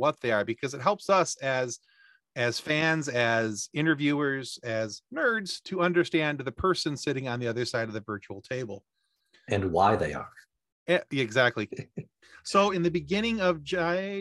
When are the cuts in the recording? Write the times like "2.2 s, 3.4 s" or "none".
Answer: 11.7 s, 12.7 s